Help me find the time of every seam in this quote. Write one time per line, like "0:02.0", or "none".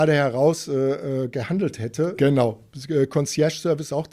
0:02.2